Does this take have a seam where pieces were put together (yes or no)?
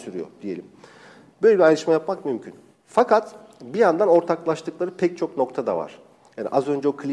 no